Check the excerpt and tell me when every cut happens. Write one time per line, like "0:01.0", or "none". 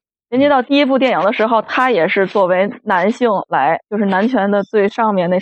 none